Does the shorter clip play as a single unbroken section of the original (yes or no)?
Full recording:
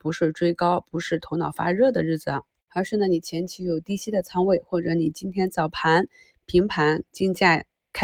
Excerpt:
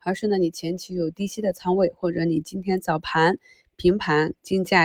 yes